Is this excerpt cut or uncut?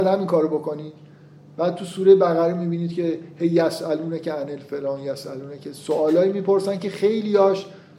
uncut